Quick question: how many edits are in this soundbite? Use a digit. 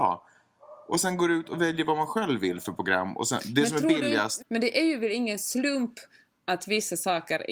1